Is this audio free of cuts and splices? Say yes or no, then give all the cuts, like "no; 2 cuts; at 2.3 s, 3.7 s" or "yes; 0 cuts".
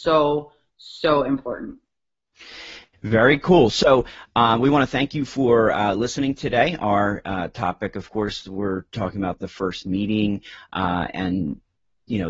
yes; 0 cuts